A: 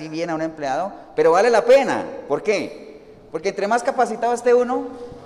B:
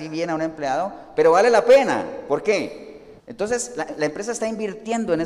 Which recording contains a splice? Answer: B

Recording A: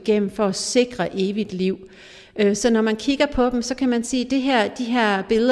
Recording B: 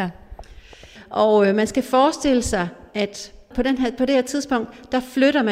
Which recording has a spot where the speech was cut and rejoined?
B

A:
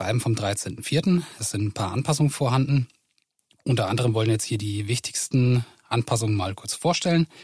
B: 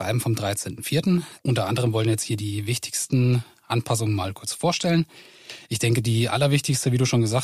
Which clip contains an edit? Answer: B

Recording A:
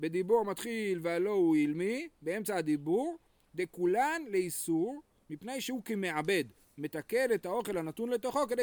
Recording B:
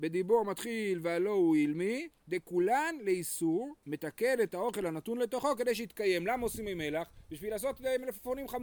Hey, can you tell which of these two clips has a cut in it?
B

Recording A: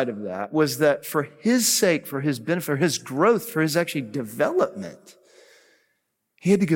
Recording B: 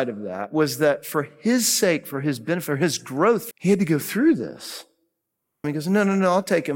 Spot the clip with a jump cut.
B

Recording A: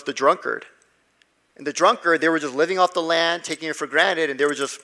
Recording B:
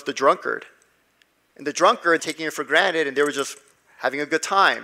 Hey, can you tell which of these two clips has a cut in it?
B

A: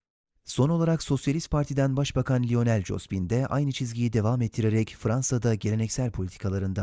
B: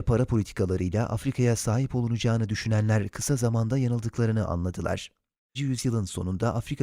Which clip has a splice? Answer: B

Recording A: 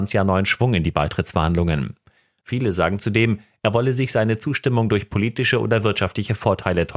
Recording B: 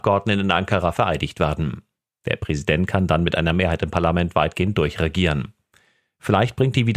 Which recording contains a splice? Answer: A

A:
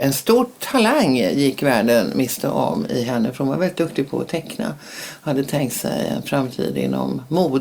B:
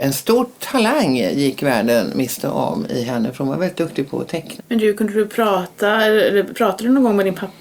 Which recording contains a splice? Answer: B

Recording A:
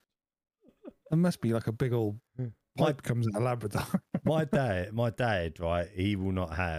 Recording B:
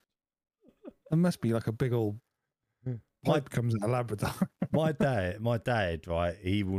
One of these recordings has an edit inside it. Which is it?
A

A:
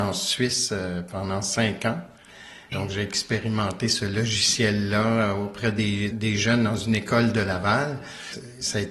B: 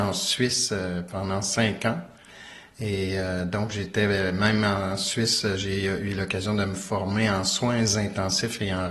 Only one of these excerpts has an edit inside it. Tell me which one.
A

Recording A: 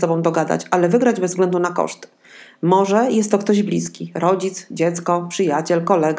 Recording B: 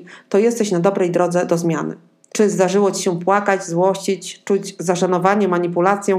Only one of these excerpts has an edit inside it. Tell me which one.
B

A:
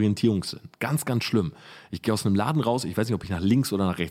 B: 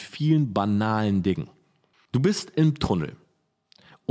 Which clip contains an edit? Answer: B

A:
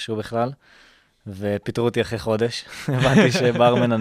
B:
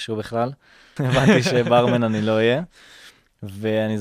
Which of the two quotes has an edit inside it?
B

